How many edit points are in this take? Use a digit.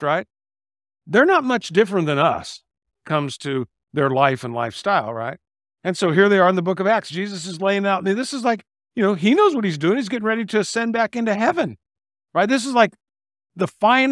0